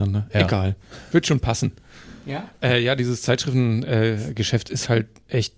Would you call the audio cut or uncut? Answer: uncut